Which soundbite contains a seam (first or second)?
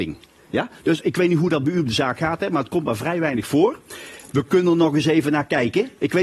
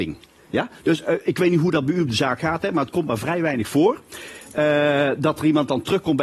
first